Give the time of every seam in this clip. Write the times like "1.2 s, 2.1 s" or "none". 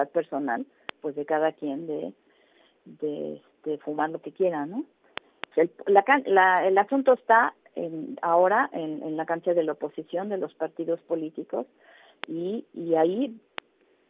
5.5 s, 12.7 s